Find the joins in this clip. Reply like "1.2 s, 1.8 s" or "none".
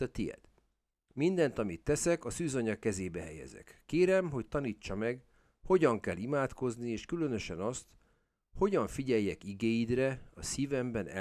none